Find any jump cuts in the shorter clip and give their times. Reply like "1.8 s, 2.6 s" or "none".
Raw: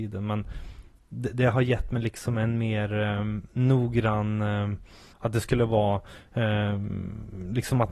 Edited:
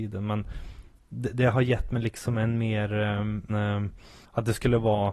3.5 s

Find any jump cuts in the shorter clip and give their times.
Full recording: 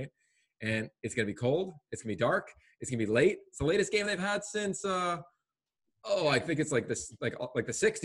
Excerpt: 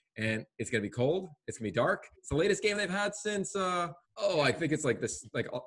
2.1 s, 4.0 s

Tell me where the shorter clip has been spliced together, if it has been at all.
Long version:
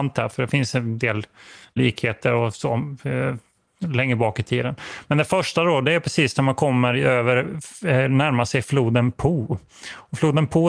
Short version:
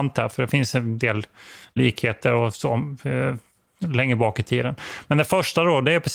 none

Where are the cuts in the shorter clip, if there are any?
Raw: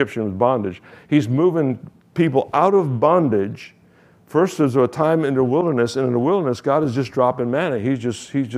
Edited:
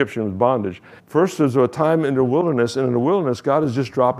1.0 s

